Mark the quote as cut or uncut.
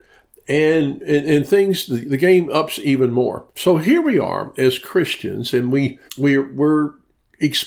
cut